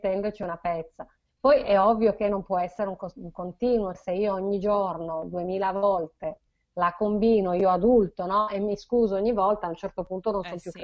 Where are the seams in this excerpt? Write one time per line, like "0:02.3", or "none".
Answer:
0:03.9